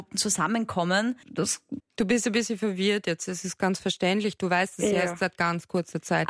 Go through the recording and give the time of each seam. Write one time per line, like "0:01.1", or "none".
0:01.8

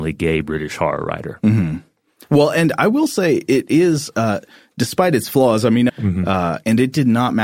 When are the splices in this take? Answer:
0:05.9

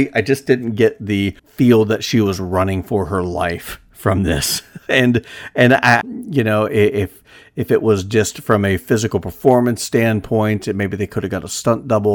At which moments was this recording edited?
0:01.4
0:06.0

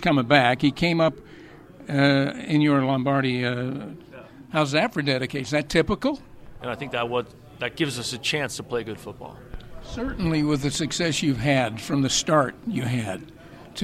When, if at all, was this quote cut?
0:04.1
0:06.6

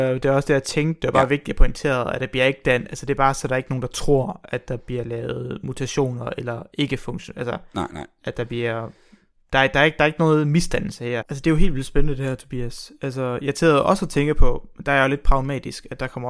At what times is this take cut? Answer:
0:11.2

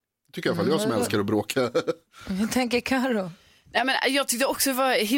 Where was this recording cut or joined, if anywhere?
none

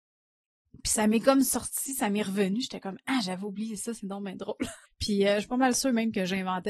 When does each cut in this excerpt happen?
0:04.8

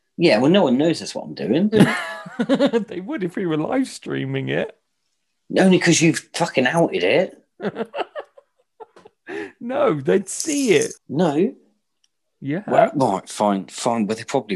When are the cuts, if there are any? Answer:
0:11.0

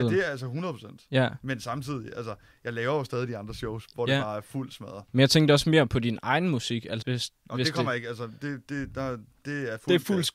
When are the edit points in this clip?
0:07.0

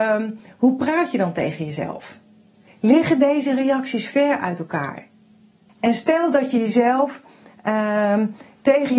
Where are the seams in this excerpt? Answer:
0:02.7
0:05.7

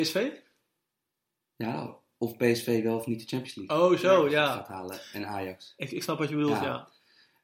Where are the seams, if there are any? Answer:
none

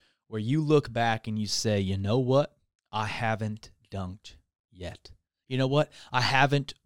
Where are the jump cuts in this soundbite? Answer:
none

